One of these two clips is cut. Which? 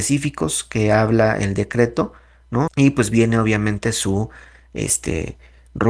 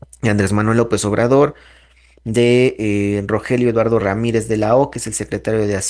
first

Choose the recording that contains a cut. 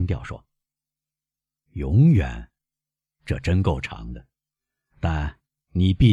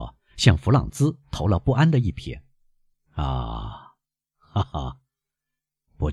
second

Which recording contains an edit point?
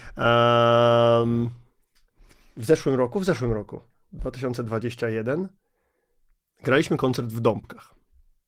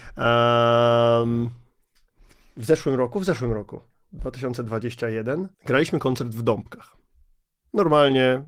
second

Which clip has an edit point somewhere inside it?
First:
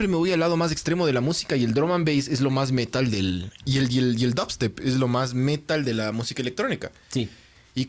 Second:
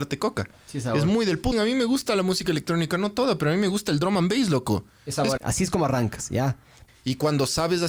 second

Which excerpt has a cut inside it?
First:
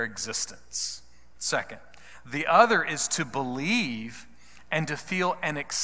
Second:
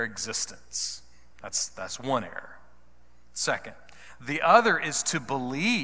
first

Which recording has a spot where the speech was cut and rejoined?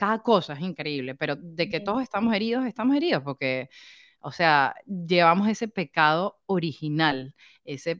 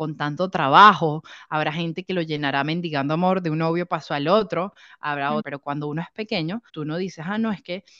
second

